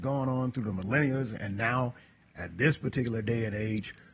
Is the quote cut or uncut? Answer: uncut